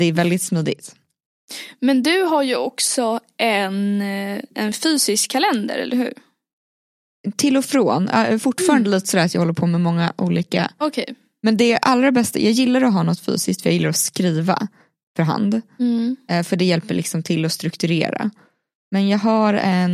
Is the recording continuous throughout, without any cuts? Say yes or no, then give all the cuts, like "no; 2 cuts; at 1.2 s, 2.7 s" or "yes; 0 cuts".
yes; 0 cuts